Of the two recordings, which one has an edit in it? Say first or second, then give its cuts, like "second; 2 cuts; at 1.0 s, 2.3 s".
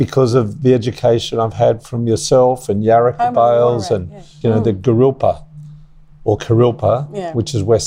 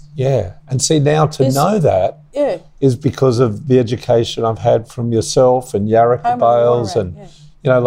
first; 1 cut; at 4.4 s